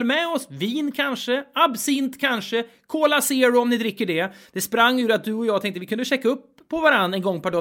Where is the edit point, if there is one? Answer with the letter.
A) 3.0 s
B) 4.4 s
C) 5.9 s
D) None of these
B